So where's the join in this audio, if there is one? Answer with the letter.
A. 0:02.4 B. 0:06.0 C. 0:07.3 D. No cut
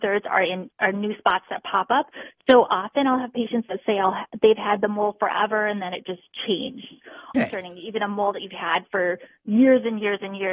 C